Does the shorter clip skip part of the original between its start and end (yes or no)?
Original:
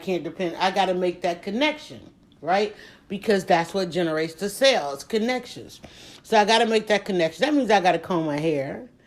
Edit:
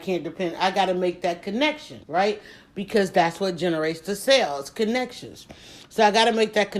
yes